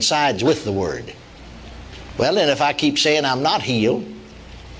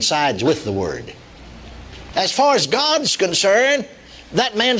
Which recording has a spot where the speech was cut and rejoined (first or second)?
second